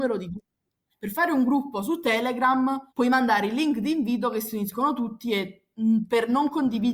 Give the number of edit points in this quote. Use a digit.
1